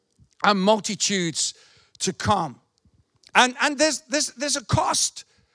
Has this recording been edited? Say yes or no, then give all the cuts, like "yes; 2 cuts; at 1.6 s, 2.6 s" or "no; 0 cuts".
no; 0 cuts